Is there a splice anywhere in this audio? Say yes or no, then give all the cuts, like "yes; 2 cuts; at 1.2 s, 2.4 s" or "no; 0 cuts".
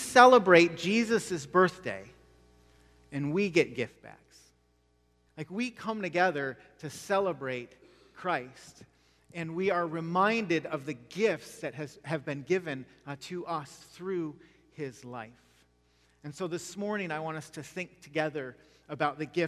yes; 1 cut; at 5.3 s